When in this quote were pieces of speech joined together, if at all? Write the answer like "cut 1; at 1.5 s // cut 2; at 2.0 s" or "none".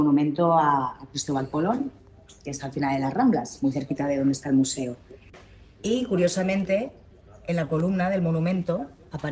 none